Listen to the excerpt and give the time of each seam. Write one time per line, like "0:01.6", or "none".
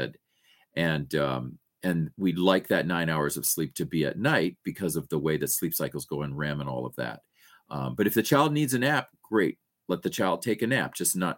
none